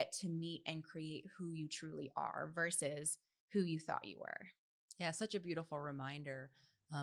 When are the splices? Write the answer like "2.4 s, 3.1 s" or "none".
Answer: none

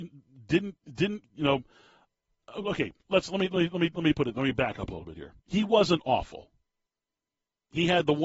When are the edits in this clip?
3.0 s, 5.4 s

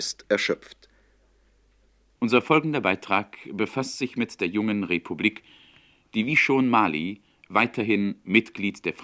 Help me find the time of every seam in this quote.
2.2 s

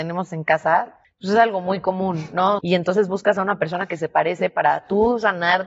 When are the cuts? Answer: 1.0 s, 2.6 s

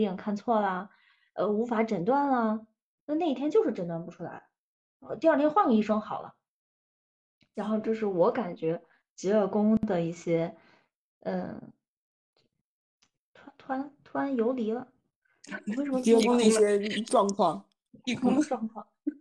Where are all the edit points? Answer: none

